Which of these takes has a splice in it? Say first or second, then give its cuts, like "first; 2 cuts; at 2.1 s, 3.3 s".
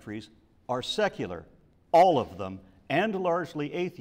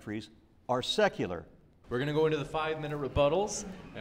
second; 1 cut; at 1.8 s